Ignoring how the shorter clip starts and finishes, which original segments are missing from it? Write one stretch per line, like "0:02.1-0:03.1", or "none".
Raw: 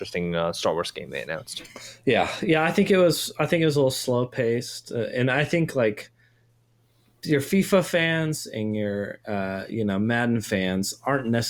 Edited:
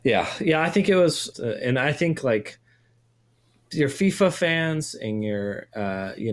0:03.3-0:04.8